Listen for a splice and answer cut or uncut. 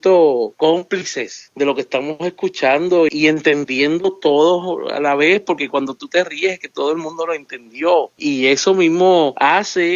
cut